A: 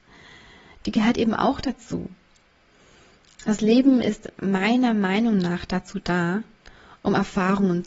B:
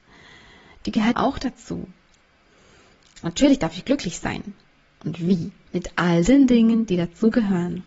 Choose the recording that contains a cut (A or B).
B